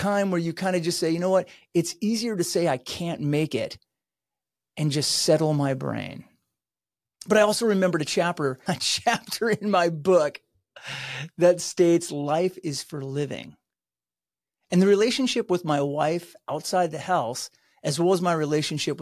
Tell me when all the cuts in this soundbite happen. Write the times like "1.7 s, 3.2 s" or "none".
8.7 s